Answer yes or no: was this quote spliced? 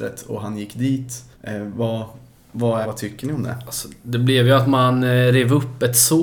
yes